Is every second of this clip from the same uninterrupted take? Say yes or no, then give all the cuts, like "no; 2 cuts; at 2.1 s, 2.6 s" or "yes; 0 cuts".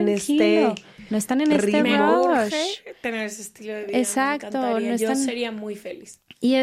yes; 0 cuts